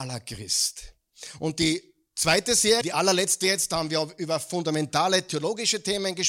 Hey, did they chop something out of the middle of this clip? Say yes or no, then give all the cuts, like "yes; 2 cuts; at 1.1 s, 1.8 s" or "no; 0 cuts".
yes; 1 cut; at 2.8 s